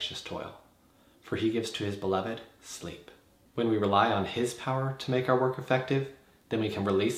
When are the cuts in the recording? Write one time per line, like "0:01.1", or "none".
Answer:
none